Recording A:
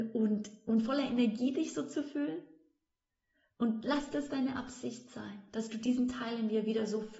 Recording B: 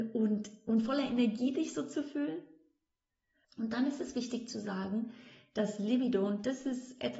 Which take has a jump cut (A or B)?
B